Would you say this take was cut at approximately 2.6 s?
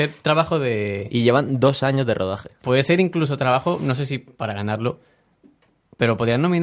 yes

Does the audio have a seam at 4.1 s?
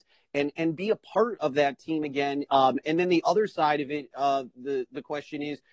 no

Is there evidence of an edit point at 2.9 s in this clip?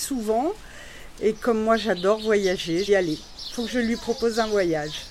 yes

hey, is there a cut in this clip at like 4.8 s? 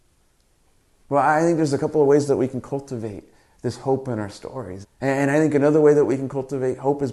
yes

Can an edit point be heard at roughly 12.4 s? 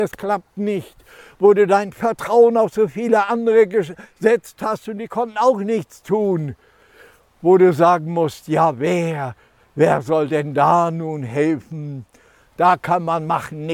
no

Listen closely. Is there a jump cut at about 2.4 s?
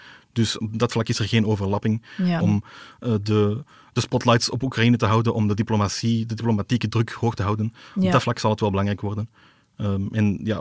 yes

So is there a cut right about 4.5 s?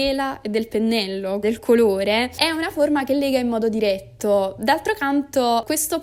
no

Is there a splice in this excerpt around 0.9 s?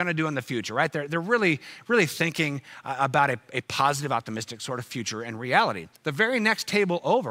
no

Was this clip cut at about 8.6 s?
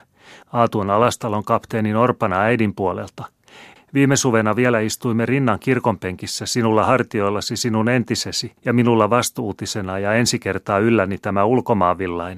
yes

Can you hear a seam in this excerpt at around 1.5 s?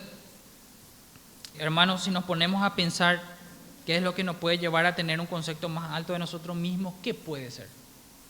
yes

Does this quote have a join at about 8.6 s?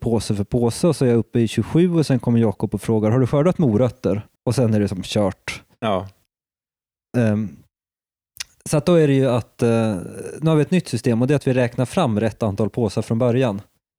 no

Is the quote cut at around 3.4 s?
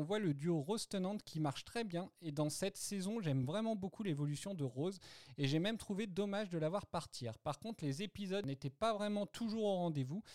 no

